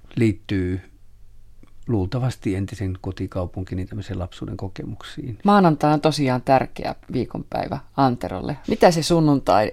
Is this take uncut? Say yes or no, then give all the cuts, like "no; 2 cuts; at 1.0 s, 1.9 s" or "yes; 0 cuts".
no; 2 cuts; at 5.4 s, 8.6 s